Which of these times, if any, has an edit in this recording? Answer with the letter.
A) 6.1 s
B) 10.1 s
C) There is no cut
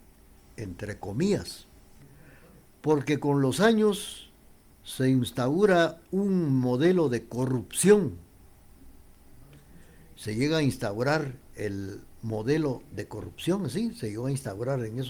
A